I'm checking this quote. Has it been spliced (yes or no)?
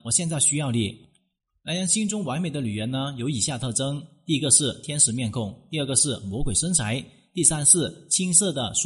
no